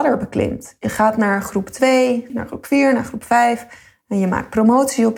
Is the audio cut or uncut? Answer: cut